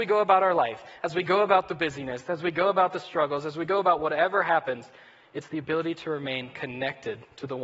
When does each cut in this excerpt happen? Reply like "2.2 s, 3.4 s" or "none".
none

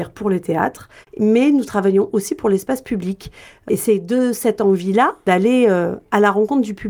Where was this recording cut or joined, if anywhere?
1.0 s

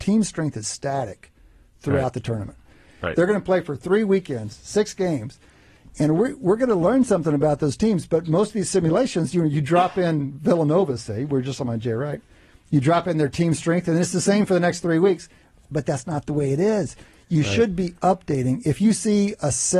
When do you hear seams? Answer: none

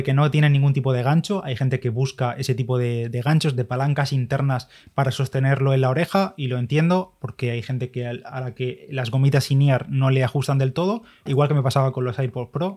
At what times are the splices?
11.3 s

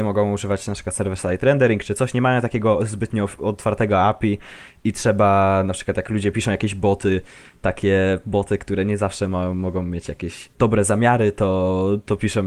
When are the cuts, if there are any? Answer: 10.5 s

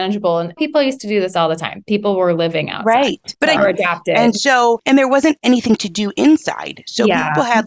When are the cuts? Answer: 3.6 s

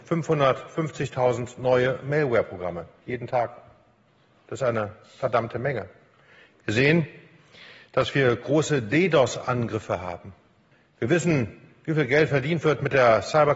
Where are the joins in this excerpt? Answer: none

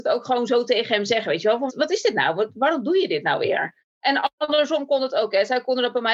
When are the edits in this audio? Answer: 1.7 s

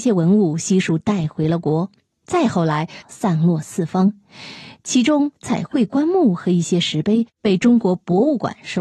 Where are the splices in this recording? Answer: 3.0 s

